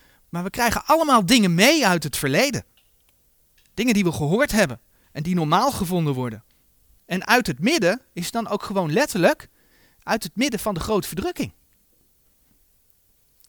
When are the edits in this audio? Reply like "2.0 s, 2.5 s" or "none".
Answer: 7.0 s